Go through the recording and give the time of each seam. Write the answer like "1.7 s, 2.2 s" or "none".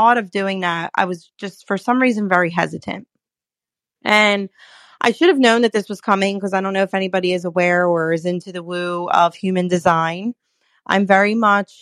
none